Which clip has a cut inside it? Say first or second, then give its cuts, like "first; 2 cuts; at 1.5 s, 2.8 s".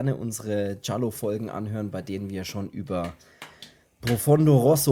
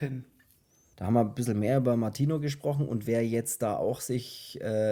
second; 1 cut; at 0.9 s